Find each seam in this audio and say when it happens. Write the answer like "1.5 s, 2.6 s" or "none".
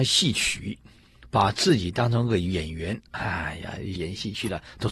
4.0 s